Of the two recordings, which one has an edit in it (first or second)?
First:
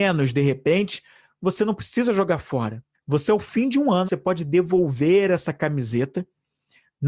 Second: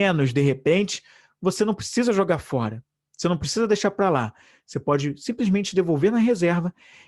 first